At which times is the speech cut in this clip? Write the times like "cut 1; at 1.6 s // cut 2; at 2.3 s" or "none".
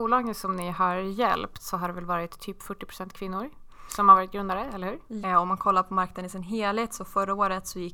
cut 1; at 5.2 s